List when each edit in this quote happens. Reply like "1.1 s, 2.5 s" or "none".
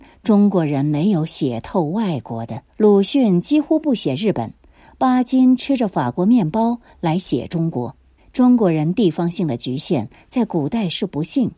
2.7 s, 8.2 s